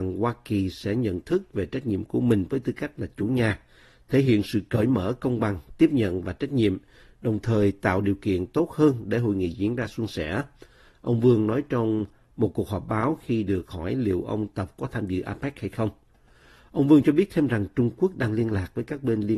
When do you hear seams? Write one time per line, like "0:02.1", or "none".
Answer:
none